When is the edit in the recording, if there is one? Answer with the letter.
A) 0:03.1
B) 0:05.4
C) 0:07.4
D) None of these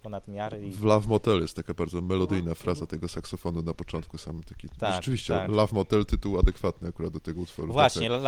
D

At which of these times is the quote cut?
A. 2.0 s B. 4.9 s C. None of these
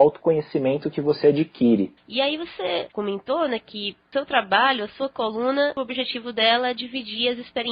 A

